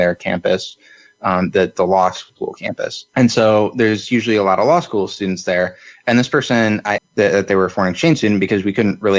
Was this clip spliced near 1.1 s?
no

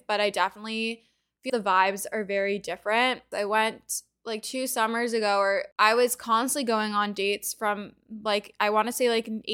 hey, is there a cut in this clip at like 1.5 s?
yes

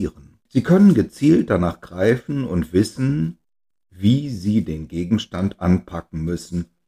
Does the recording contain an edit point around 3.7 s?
no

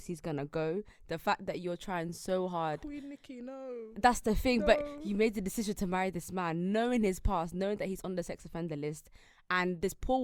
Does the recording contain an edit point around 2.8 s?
no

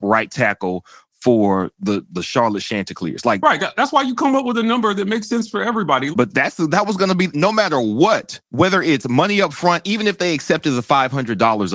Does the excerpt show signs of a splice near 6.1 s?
yes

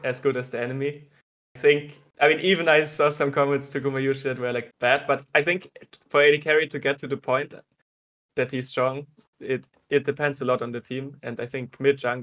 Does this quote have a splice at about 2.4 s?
no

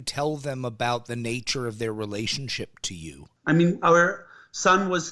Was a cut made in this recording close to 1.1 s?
no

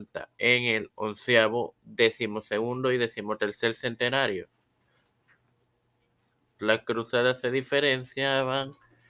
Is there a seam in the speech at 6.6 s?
yes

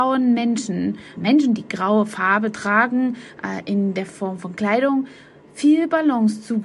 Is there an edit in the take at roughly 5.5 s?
no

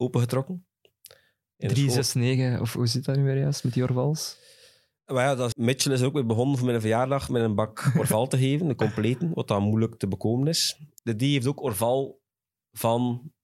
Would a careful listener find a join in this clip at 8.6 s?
no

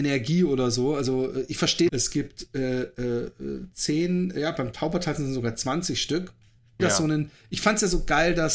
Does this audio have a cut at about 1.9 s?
yes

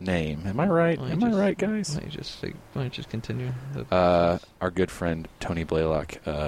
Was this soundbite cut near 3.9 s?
no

